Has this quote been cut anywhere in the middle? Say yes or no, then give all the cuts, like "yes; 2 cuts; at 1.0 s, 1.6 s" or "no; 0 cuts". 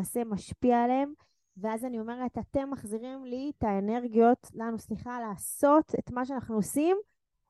no; 0 cuts